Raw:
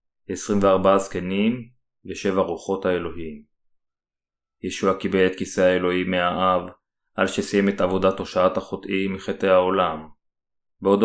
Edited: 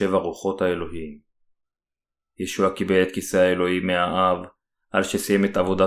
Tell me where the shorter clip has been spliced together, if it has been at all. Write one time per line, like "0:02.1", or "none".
none